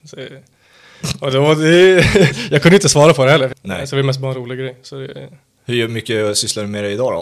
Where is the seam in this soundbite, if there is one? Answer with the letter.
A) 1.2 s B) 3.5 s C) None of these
B